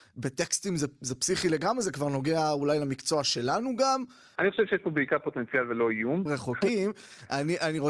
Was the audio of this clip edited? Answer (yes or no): yes